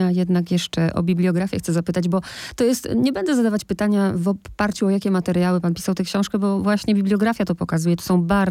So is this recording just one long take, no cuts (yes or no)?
yes